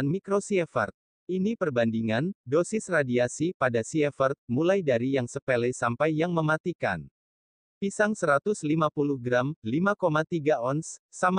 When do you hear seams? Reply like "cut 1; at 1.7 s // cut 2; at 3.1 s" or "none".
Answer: cut 1; at 1.1 s